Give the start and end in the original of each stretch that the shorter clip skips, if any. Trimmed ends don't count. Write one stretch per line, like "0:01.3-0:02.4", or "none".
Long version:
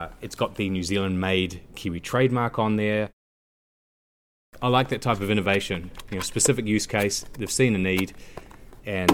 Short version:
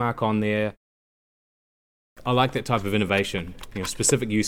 none